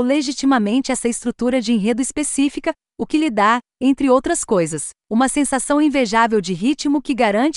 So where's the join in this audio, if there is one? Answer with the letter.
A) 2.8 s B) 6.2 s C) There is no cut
C